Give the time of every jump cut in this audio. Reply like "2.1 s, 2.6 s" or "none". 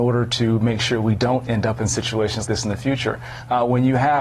2.5 s